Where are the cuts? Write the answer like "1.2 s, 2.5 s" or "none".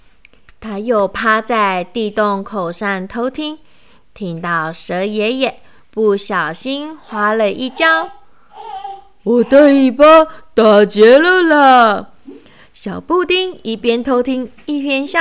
9.2 s